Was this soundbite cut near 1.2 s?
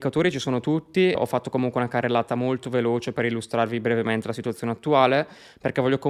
yes; 1 cut; at 1.2 s

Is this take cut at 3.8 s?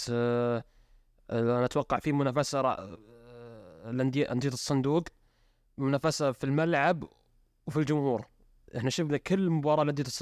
no; 0 cuts

